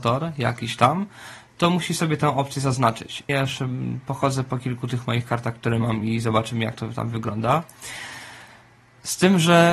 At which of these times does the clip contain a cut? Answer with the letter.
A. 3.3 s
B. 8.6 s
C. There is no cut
A